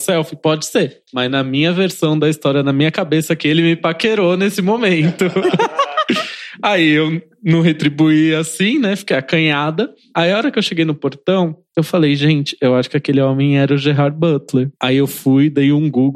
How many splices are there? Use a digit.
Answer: 2